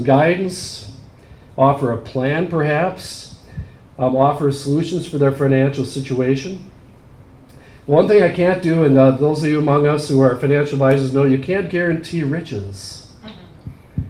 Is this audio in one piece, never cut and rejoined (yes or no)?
yes